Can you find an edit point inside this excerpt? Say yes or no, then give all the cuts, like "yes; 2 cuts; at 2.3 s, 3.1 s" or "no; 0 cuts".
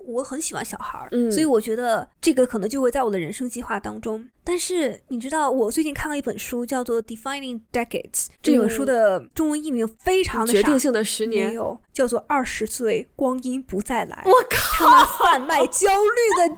no; 0 cuts